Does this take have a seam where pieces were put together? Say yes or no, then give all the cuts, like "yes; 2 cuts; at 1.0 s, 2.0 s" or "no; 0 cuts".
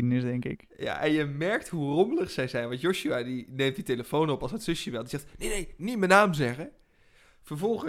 no; 0 cuts